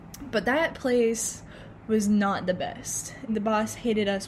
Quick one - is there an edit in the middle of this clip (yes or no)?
yes